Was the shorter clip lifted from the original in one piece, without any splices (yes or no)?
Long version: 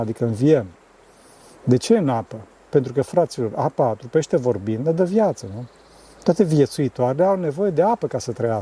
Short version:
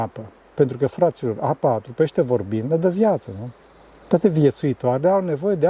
yes